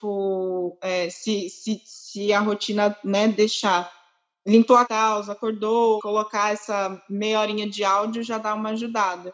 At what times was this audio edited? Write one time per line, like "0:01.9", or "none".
0:04.8
0:06.0